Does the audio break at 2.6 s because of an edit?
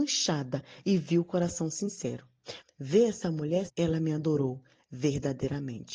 yes; 2 cuts; at 2.6 s, 3.7 s

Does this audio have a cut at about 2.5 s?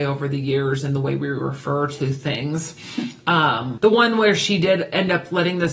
no; 1 cut; at 3.8 s

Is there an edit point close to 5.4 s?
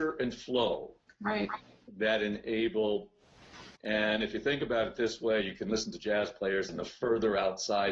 no; 2 cuts; at 3.8 s, 6.7 s

